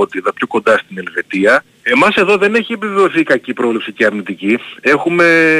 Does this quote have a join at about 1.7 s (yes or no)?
yes